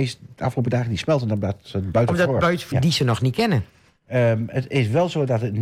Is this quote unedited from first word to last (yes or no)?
no